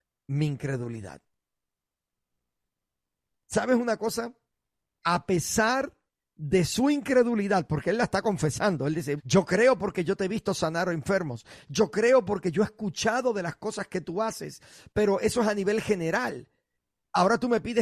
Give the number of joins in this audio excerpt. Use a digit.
1